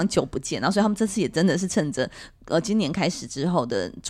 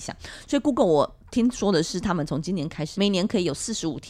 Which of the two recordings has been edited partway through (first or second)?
second